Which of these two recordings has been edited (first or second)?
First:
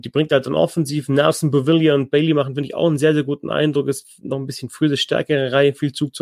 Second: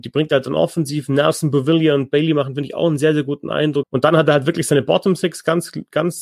second